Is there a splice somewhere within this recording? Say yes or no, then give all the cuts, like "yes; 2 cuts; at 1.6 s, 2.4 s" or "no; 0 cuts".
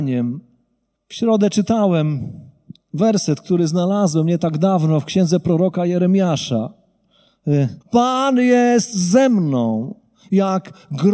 yes; 2 cuts; at 0.9 s, 7.8 s